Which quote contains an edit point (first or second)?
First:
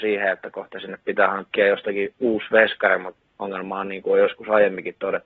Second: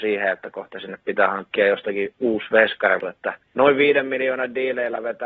second